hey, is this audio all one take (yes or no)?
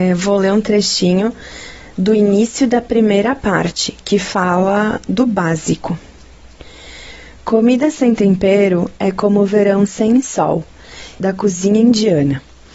no